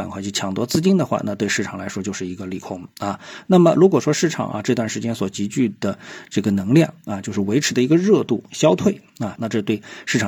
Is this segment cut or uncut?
cut